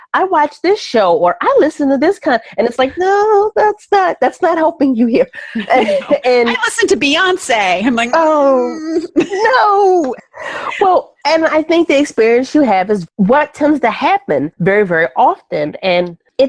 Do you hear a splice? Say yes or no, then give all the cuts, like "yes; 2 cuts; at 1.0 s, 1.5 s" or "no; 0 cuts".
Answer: yes; 1 cut; at 10.2 s